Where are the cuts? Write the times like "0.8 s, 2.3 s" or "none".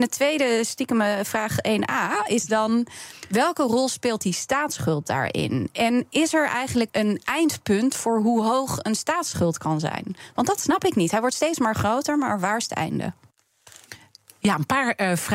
6.9 s